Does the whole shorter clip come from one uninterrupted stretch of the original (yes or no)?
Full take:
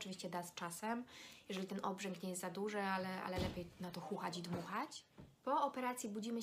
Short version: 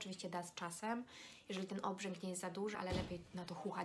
no